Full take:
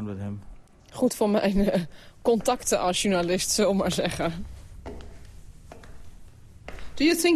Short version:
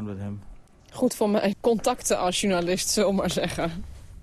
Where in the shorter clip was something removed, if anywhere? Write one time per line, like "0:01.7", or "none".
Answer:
0:01.5